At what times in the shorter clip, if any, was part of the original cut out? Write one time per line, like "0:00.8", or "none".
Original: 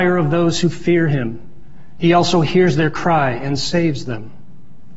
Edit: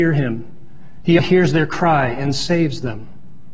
0:01.2